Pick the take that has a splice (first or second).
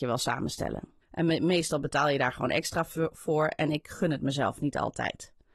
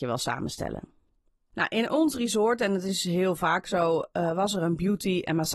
first